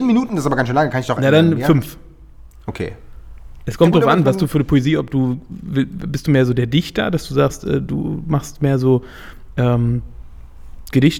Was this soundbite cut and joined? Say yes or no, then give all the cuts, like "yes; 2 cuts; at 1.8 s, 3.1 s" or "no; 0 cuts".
no; 0 cuts